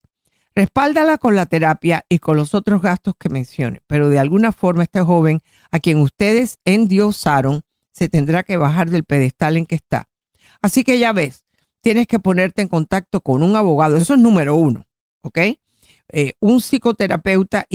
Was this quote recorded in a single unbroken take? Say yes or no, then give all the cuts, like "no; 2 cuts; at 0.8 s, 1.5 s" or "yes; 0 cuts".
yes; 0 cuts